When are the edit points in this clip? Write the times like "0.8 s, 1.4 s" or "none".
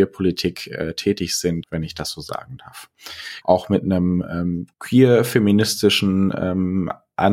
1.6 s, 3.4 s, 4.7 s